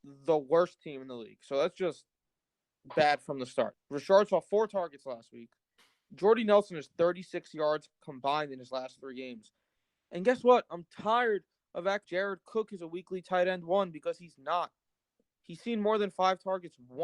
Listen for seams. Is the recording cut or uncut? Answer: cut